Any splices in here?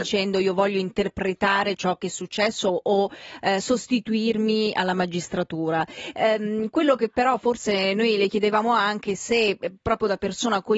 no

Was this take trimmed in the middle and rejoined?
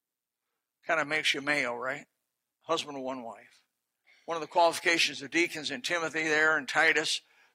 no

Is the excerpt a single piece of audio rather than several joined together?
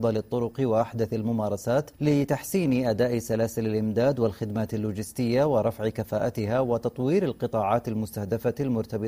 yes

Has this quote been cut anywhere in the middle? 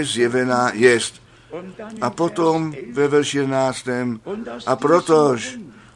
no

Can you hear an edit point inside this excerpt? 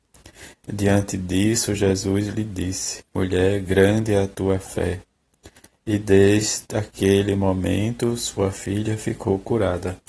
yes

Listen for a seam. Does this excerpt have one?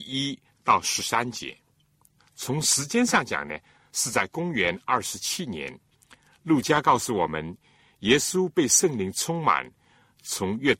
yes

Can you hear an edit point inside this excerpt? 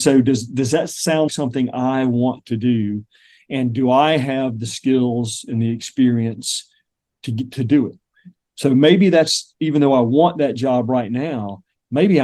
yes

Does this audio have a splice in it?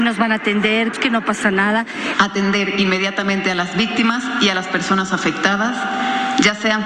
yes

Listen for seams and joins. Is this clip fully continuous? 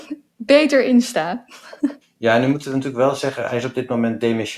no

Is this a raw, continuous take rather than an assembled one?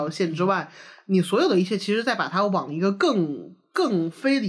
yes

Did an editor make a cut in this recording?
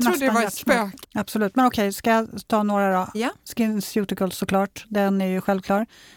yes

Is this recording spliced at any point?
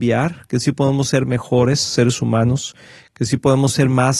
no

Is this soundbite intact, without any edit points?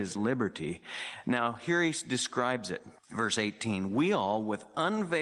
no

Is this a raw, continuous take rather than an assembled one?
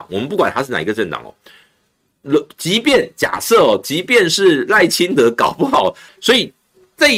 no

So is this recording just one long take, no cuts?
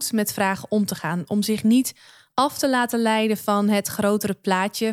yes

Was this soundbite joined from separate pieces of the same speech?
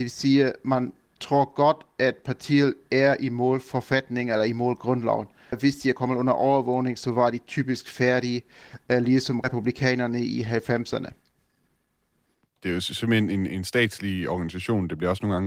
yes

